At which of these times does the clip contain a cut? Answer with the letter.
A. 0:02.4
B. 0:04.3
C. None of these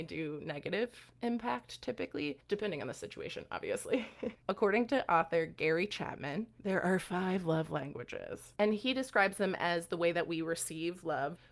B